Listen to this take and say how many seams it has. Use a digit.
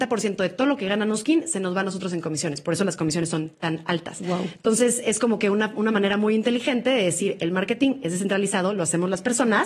0